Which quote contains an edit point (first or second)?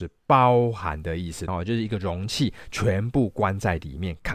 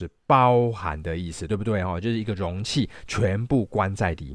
first